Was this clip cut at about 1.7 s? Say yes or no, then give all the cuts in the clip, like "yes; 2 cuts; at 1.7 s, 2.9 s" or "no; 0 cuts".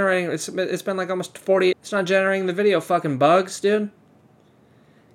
yes; 1 cut; at 1.7 s